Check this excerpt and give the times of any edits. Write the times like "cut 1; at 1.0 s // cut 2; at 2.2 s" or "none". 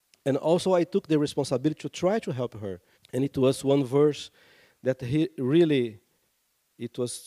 cut 1; at 2.9 s